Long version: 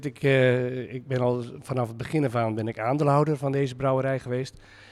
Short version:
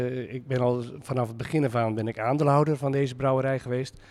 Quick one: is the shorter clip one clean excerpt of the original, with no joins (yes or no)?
yes